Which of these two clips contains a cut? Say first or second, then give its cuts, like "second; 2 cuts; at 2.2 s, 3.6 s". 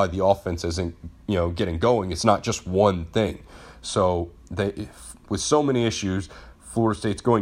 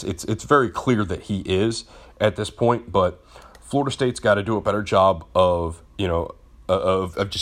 first; 1 cut; at 5.3 s